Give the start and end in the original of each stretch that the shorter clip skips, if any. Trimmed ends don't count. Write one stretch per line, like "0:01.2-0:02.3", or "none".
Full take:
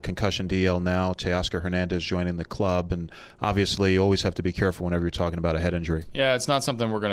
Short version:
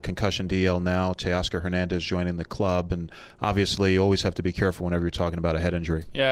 none